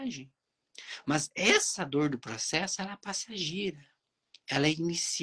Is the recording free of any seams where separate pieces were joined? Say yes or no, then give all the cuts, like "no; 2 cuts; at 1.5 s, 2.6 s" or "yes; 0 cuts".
yes; 0 cuts